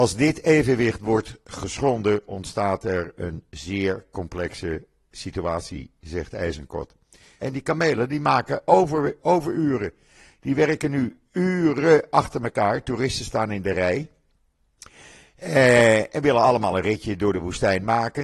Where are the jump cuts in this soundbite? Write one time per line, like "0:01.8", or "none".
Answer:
0:07.4